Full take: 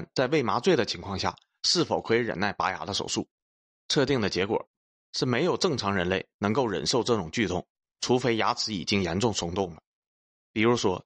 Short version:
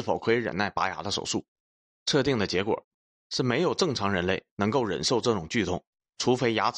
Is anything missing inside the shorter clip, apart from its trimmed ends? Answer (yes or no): no